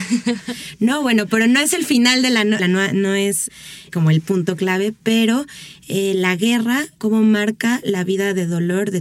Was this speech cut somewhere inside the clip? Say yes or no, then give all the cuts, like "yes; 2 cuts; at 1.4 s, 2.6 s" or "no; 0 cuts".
yes; 1 cut; at 2.6 s